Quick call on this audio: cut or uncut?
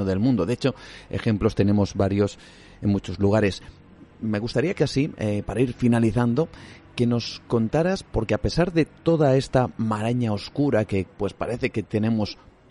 cut